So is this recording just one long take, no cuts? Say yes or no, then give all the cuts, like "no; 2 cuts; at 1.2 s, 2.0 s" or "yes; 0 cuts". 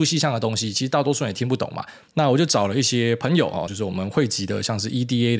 no; 2 cuts; at 2.1 s, 3.7 s